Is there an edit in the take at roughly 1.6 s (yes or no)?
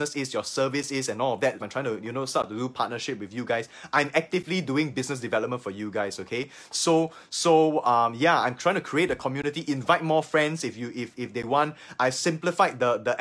yes